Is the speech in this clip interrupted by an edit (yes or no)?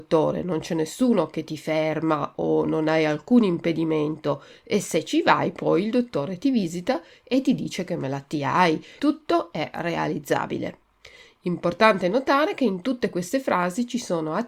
yes